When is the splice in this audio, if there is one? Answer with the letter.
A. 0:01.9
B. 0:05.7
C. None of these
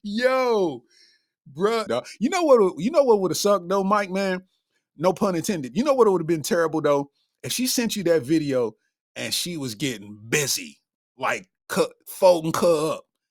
A